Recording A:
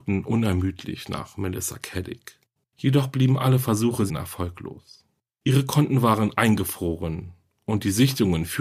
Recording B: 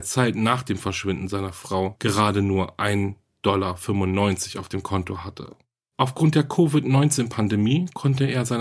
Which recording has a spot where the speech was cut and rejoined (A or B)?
A